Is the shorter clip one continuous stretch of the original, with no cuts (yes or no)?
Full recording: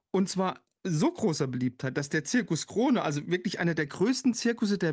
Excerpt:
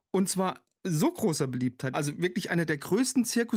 no